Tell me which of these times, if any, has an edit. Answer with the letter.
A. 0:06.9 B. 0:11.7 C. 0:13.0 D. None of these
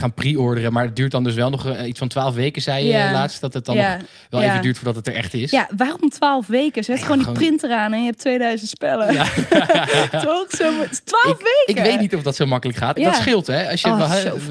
C